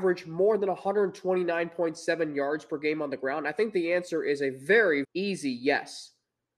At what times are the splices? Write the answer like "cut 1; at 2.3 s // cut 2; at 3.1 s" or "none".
cut 1; at 5.0 s